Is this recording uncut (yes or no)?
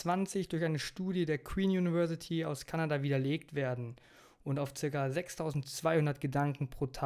yes